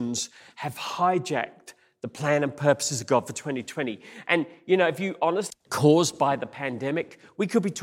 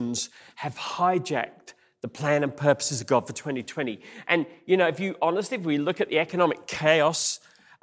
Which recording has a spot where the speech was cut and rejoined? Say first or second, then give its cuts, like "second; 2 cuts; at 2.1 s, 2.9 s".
first; 1 cut; at 5.5 s